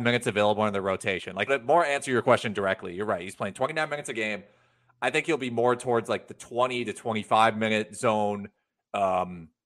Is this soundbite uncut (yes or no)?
no